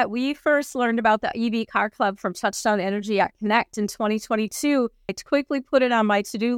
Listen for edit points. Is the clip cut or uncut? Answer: cut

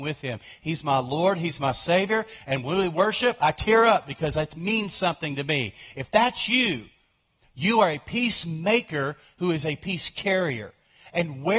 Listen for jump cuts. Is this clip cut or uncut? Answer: uncut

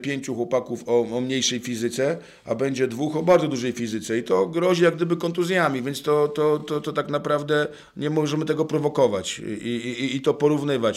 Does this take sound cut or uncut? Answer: uncut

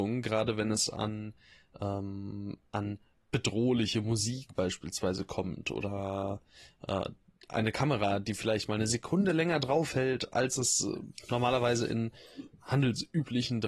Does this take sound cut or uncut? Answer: uncut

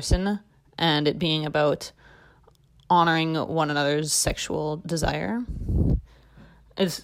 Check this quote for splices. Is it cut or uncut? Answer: uncut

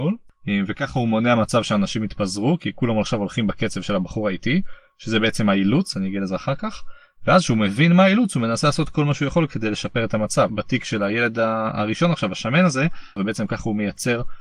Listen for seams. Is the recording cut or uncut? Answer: cut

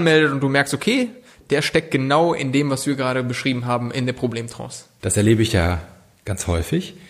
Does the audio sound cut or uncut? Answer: cut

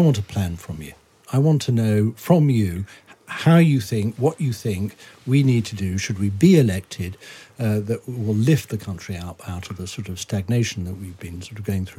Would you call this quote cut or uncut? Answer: uncut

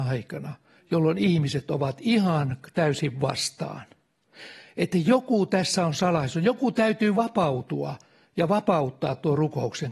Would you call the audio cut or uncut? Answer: uncut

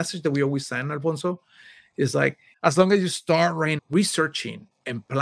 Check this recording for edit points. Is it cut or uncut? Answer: cut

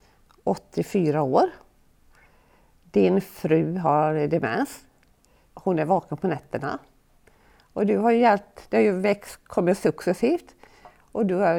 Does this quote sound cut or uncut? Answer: uncut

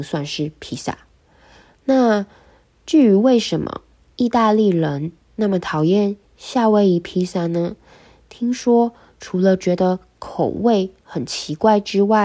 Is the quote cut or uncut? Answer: uncut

